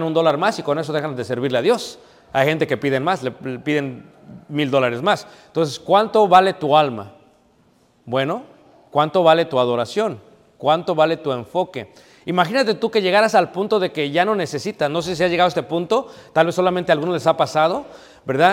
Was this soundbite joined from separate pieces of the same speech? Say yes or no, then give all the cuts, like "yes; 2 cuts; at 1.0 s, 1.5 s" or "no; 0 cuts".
no; 0 cuts